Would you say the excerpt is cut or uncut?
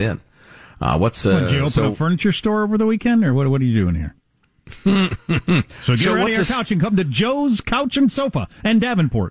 uncut